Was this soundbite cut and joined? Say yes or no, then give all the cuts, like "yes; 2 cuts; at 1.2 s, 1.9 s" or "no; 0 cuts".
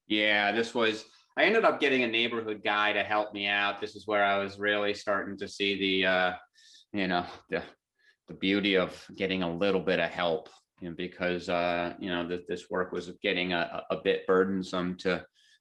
no; 0 cuts